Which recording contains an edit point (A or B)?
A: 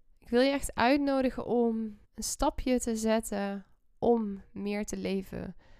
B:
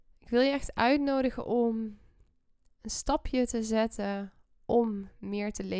A